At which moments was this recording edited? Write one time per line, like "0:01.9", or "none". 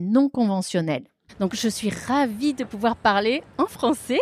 0:01.3